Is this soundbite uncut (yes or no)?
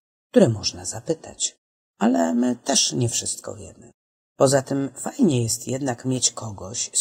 yes